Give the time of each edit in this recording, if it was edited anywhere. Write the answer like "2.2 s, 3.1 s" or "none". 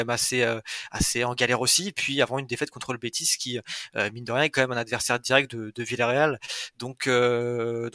none